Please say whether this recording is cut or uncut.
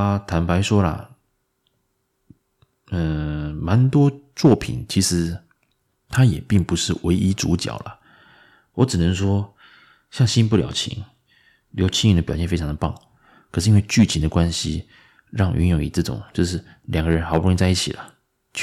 uncut